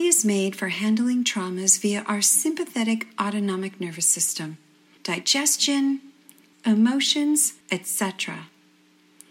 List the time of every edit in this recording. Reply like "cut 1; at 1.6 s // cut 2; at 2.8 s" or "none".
cut 1; at 5.0 s // cut 2; at 6.5 s // cut 3; at 7.6 s